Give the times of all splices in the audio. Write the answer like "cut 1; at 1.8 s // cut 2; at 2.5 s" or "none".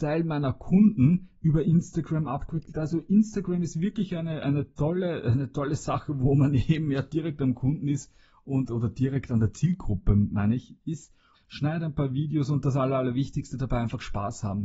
cut 1; at 11.3 s